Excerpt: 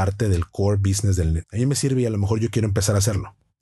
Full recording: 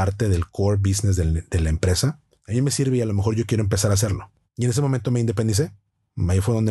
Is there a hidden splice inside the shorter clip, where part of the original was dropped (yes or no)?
yes